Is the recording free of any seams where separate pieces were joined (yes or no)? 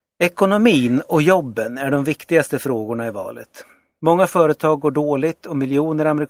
yes